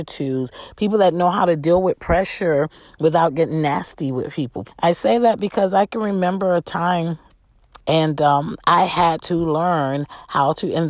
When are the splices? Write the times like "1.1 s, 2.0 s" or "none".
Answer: 4.6 s, 7.8 s